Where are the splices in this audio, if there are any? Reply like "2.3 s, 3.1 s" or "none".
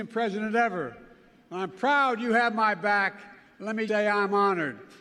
3.9 s